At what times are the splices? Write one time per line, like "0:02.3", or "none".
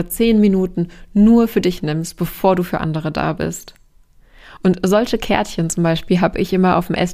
0:04.6